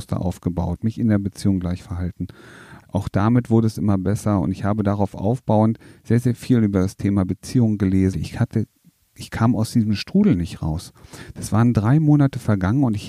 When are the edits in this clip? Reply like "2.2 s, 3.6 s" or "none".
2.8 s, 8.1 s